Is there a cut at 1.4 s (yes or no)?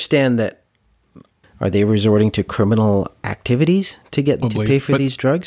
yes